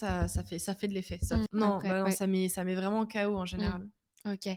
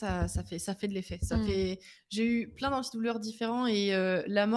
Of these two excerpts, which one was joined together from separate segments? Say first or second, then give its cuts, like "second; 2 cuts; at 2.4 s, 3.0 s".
first; 1 cut; at 1.5 s